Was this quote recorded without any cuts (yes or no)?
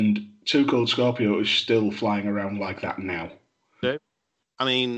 no